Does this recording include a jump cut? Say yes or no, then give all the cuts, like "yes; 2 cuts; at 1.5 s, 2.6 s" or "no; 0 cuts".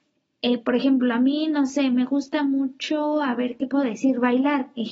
no; 0 cuts